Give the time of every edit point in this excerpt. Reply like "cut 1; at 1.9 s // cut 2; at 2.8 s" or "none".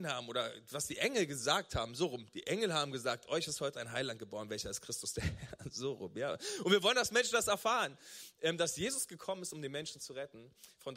none